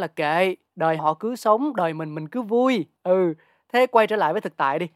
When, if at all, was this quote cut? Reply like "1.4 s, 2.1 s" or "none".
1.0 s